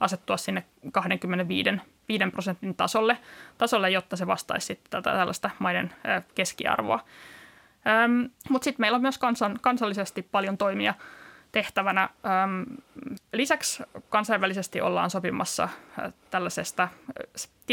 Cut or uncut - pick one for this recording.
cut